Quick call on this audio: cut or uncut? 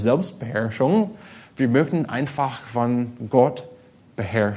uncut